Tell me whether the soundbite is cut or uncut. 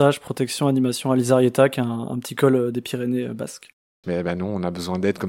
cut